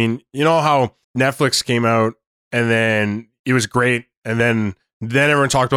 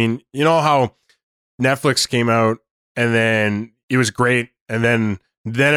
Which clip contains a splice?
first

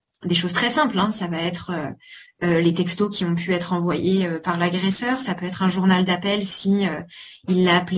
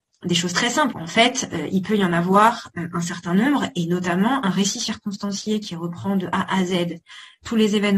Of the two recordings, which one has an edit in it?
second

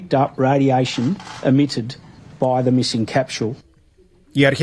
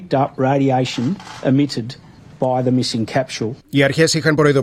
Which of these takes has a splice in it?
second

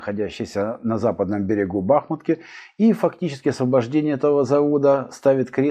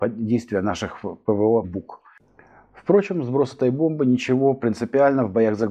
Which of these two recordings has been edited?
second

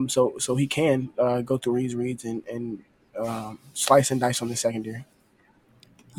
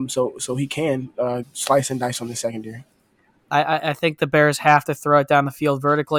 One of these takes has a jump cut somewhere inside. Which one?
second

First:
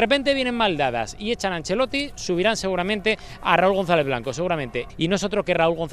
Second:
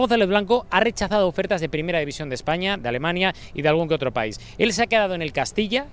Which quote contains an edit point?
first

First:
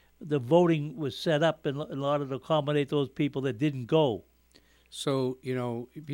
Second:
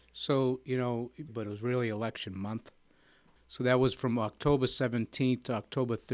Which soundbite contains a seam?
second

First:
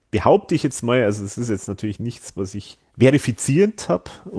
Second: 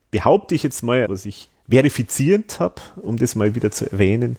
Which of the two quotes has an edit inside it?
second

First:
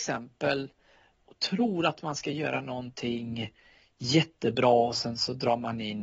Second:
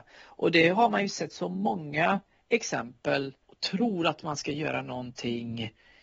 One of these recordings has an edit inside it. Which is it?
second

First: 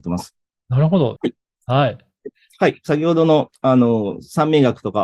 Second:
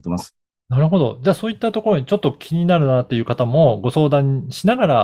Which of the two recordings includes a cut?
first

